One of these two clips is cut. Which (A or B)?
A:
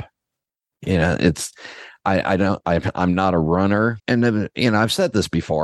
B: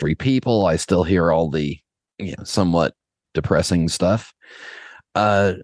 A